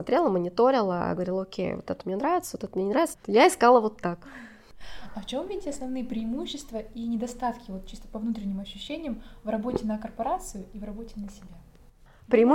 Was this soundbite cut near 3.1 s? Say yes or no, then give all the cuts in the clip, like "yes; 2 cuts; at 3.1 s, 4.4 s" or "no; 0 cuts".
yes; 1 cut; at 3.1 s